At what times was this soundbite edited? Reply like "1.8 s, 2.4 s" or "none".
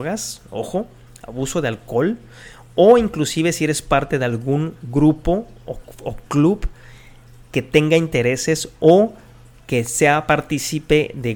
none